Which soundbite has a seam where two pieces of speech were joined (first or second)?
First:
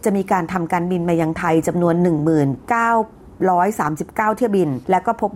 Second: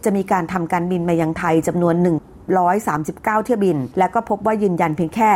second